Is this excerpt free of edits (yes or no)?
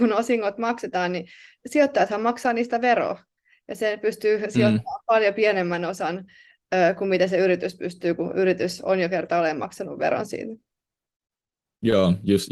yes